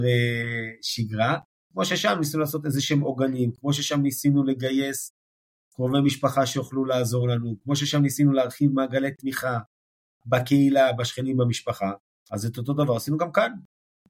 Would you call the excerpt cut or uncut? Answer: uncut